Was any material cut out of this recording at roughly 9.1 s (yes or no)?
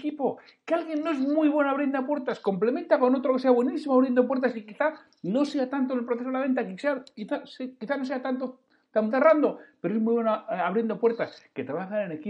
yes